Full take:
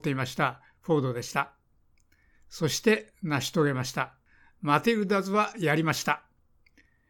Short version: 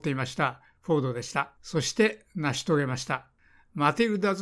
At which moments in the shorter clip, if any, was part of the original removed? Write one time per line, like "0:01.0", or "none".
0:01.6